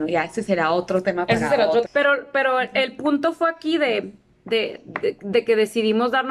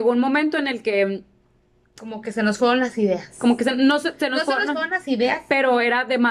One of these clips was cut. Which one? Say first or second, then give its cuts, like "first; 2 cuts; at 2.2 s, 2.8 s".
first; 1 cut; at 1.9 s